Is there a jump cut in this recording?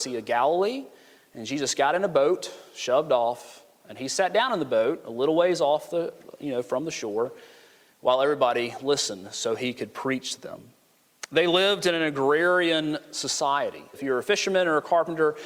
yes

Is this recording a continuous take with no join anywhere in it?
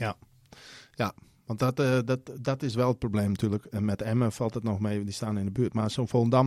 yes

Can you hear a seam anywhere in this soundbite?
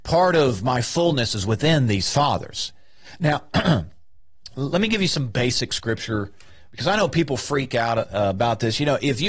yes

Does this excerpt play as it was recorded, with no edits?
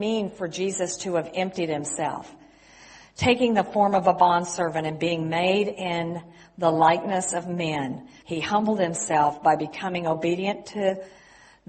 no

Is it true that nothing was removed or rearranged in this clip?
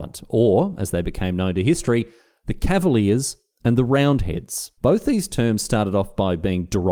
no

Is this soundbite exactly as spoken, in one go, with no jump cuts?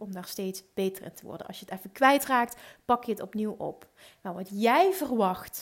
yes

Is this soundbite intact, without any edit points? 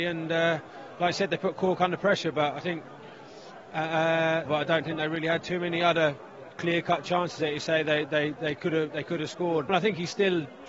no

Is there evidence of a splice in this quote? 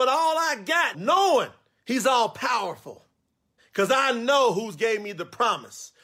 yes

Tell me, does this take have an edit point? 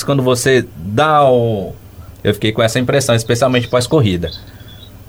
yes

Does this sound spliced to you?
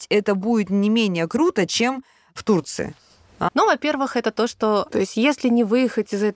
yes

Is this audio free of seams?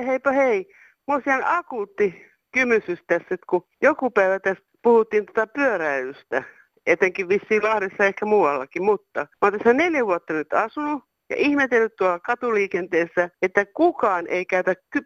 no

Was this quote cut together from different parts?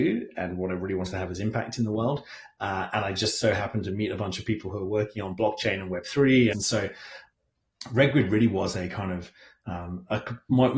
yes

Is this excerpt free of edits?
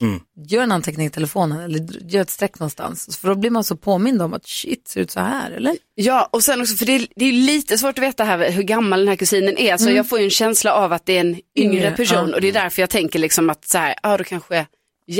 yes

